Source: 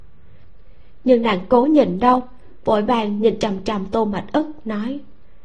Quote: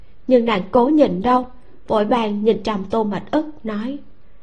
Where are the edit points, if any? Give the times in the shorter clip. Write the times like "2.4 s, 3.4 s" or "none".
2.6 s